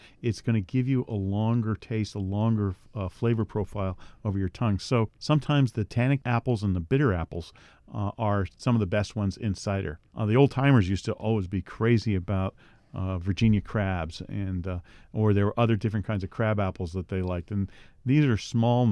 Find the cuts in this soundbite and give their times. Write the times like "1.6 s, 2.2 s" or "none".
none